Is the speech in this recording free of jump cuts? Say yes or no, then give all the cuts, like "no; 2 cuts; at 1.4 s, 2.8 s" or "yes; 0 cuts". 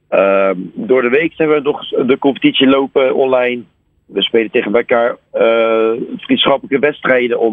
yes; 0 cuts